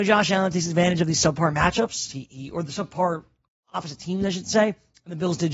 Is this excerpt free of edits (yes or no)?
yes